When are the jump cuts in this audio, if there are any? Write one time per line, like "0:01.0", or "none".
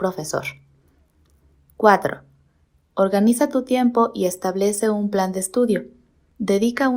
0:02.7

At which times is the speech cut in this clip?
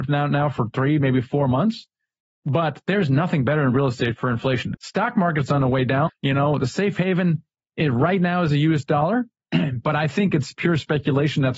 0:04.7
0:06.1

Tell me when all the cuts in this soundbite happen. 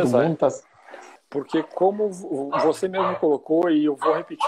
0:01.2

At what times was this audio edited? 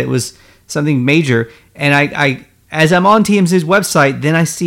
none

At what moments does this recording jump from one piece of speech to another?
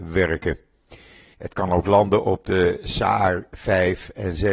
0:01.3

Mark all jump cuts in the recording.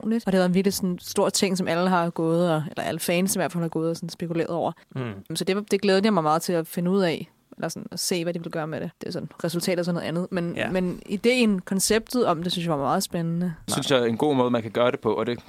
0:13.7

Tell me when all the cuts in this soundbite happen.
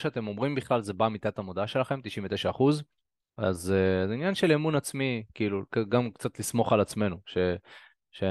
none

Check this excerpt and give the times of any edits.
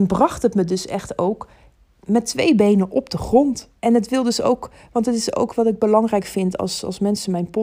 0:03.8

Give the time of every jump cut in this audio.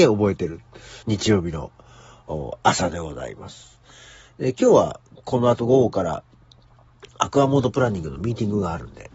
0:01.0

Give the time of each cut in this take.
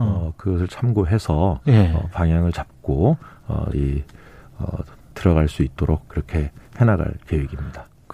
0:03.7
0:05.1

